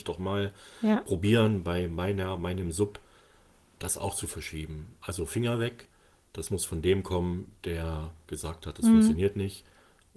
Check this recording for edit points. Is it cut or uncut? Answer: uncut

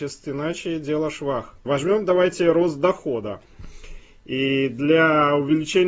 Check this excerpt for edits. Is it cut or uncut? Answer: cut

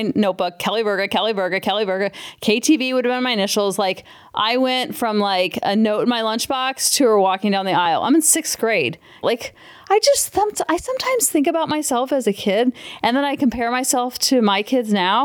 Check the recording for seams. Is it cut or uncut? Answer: cut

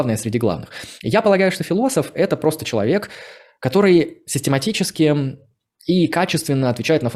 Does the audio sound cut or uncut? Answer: uncut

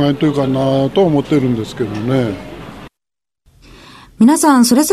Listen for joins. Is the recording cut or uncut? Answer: uncut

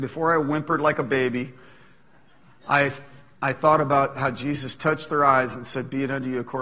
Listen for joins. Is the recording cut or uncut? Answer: uncut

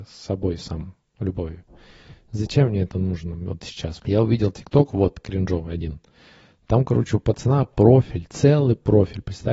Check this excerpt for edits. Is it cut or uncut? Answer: cut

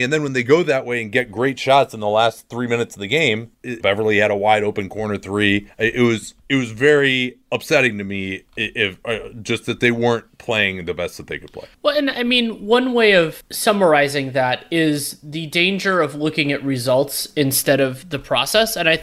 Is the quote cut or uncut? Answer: cut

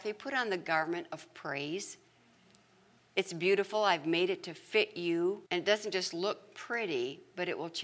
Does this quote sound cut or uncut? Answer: cut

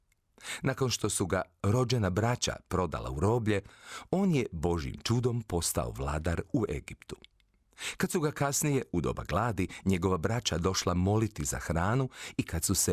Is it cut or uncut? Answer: uncut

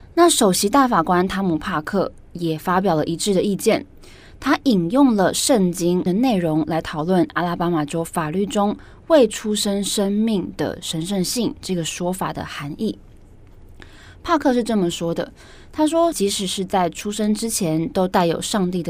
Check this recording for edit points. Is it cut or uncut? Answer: cut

